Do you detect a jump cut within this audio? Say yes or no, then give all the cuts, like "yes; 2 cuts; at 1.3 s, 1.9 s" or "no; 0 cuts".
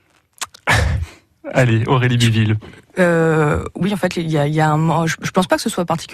no; 0 cuts